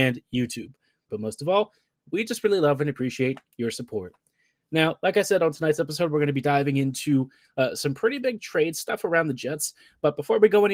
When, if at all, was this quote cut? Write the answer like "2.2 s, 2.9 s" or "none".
1.1 s